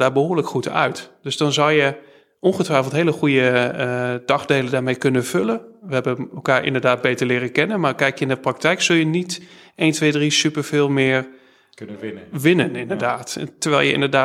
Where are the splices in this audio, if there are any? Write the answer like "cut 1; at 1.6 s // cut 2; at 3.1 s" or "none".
none